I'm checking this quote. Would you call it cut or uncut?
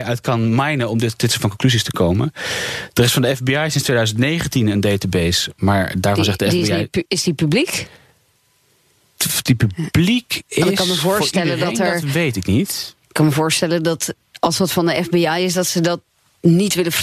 uncut